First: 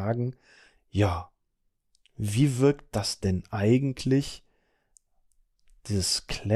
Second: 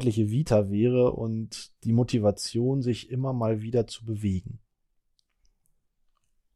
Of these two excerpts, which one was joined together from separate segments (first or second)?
second